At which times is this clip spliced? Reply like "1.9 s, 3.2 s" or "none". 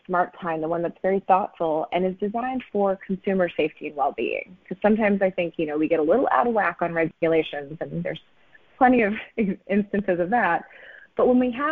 none